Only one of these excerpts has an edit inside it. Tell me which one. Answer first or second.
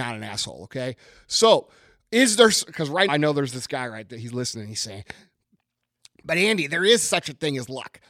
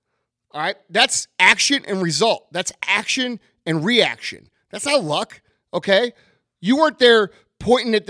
first